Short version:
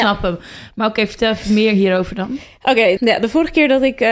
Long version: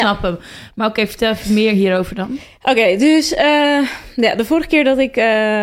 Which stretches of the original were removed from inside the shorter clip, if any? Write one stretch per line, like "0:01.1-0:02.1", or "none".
0:03.0-0:04.1

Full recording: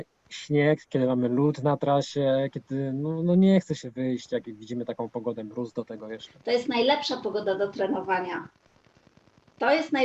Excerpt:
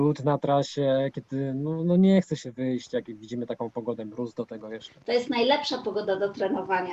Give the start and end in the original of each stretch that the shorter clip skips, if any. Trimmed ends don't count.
none

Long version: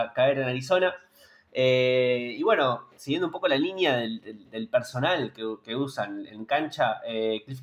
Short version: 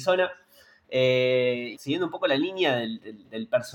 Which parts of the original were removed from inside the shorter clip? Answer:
0:02.4-0:02.9

